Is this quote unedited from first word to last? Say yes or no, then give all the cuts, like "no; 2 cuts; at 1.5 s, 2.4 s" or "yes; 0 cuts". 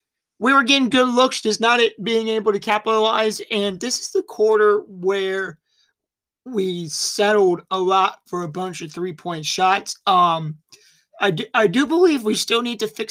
yes; 0 cuts